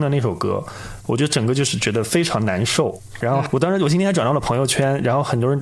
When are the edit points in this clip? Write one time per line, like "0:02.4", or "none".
0:03.2